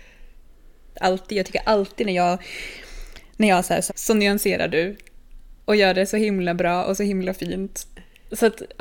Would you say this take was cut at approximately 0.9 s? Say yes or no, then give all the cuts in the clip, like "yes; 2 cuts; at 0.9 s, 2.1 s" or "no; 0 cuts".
yes; 2 cuts; at 0.9 s, 3.9 s